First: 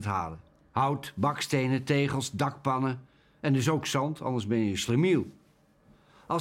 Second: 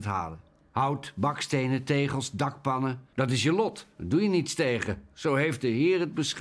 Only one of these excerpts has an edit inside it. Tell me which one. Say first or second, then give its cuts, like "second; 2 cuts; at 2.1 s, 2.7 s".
second; 1 cut; at 3.1 s